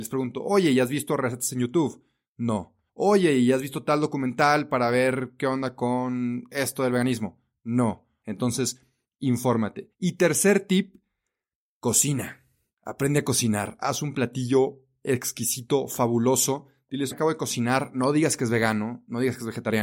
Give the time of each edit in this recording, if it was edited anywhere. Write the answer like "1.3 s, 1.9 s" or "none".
8.2 s, 17.1 s